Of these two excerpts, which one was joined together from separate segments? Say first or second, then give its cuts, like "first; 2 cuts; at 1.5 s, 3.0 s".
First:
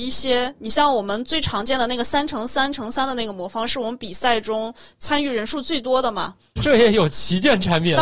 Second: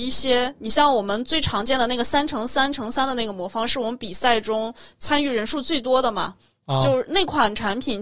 first; 1 cut; at 6.6 s